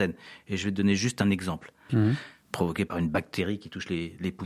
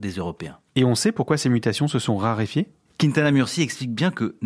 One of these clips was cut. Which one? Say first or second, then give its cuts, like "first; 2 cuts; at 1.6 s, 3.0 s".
first; 1 cut; at 1.9 s